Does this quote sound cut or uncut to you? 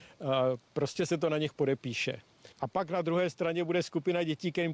cut